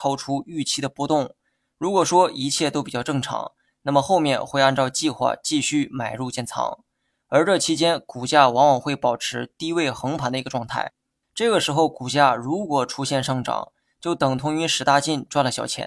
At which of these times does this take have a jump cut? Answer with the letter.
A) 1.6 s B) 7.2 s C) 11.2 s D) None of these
C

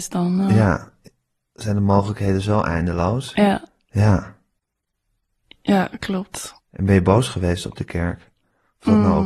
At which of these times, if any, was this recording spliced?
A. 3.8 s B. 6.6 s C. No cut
B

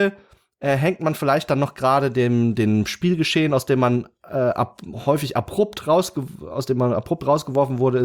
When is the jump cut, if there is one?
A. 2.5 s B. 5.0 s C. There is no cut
C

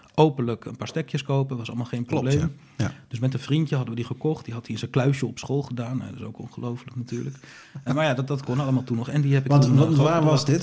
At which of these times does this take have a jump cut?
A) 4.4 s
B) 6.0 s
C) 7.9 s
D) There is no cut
C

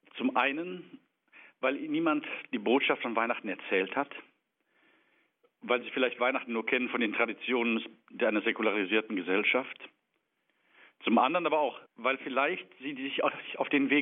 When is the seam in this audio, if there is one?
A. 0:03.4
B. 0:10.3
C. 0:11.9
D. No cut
C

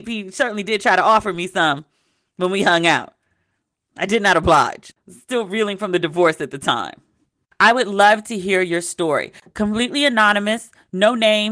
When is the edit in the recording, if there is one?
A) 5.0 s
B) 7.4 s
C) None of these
B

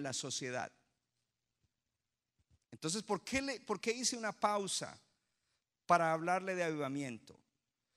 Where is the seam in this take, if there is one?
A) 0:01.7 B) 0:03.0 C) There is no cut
C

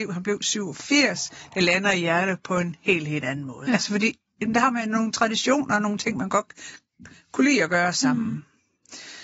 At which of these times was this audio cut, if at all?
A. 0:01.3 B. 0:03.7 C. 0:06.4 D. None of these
B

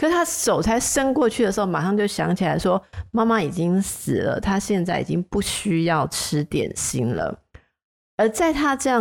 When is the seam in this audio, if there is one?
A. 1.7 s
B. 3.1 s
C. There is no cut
C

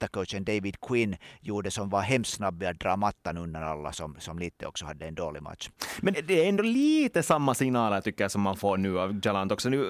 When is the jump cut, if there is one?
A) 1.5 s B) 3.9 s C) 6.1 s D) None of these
C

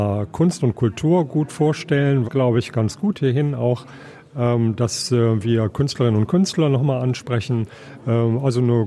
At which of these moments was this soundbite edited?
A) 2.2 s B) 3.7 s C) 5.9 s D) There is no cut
A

